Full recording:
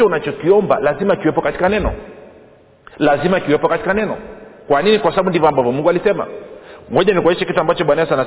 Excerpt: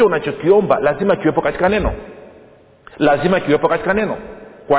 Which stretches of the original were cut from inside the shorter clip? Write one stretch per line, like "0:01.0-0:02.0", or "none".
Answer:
none

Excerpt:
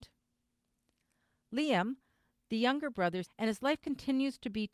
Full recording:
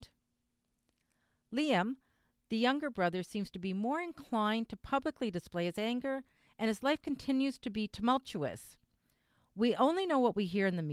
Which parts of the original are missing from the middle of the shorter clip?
0:03.3-0:06.5

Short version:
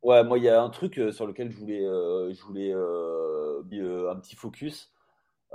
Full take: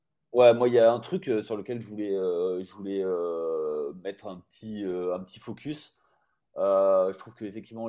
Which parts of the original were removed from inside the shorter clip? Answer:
0:04.0-0:04.8

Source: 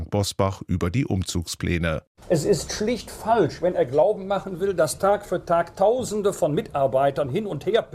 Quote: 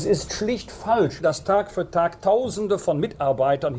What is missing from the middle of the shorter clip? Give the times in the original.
0:03.6-0:04.7

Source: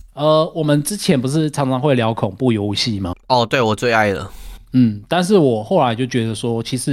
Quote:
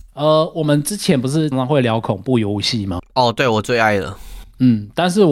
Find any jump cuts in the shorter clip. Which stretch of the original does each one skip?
0:01.5-0:01.6

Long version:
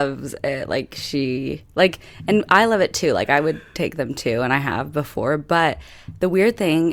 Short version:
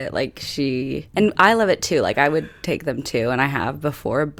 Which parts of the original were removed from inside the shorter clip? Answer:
0:01.7-0:02.3

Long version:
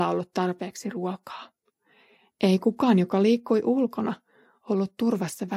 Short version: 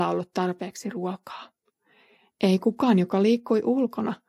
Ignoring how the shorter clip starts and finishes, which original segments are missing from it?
none

